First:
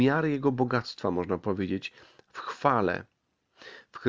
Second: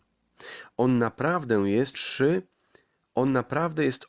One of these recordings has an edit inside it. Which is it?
second; 1 cut; at 1.9 s

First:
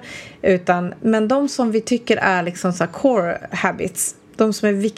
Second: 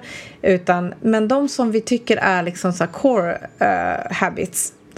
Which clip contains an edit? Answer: first; 1 cut; at 3.5 s

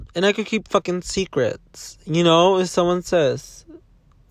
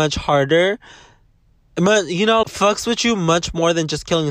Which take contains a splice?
second; 1 cut; at 2.4 s

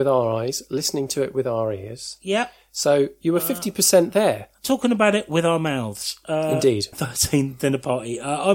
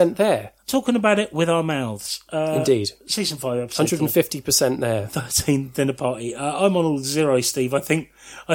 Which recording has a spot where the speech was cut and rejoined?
first; 1 cut; at 6.9 s

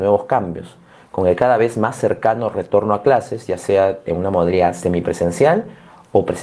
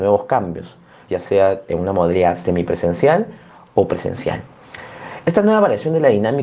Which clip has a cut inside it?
second; 1 cut; at 1.1 s

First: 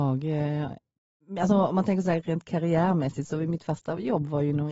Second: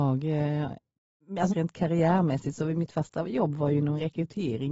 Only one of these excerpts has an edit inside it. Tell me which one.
second; 1 cut; at 1.5 s

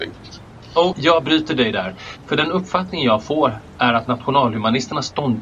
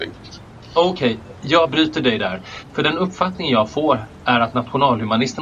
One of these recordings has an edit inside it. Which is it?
first; 1 cut; at 0.9 s

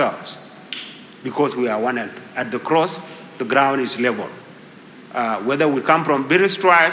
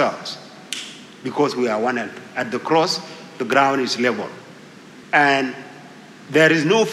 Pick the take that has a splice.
second; 1 cut; at 5.0 s

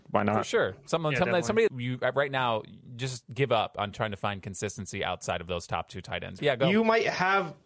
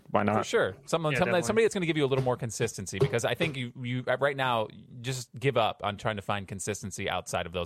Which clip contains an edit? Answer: first; 2 cuts; at 1.7 s, 6.4 s

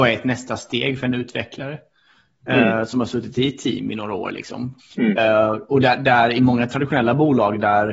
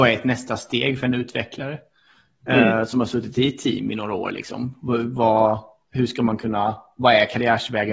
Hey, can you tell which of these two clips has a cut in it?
first; 1 cut; at 4.8 s

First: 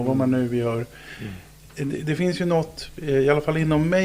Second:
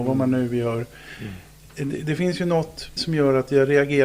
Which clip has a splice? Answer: second; 1 cut; at 3.0 s

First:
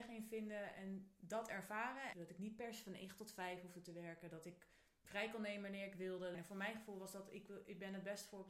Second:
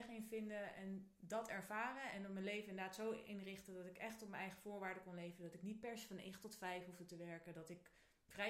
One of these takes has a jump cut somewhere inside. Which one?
first; 2 cuts; at 2.1 s, 6.3 s

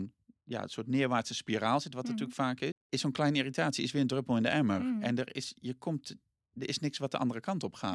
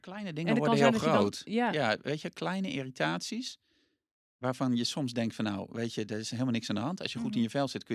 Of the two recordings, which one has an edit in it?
first; 1 cut; at 2.7 s

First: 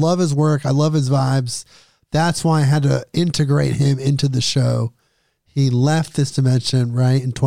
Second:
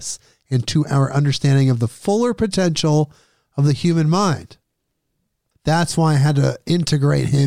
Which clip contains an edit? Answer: second; 1 cut; at 5.5 s

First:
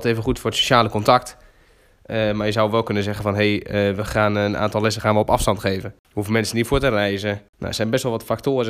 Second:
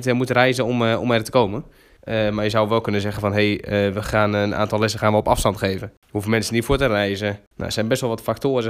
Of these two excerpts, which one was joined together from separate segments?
second; 1 cut; at 2.0 s

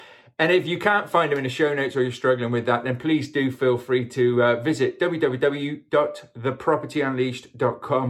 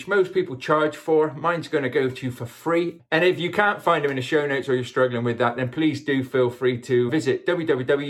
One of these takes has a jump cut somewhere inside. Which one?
second; 2 cuts; at 3.0 s, 7.1 s

